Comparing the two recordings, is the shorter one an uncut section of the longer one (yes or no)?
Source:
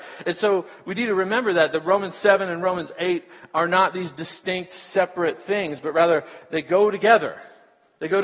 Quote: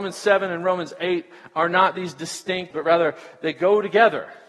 no